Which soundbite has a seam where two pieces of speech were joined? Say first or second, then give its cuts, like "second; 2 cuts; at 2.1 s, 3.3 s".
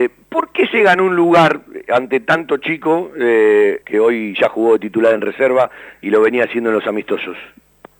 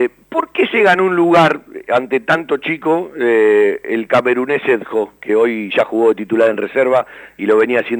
first; 1 cut; at 3.8 s